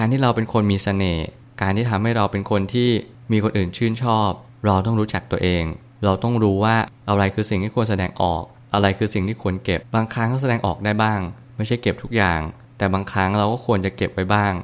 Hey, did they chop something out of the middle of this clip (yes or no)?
yes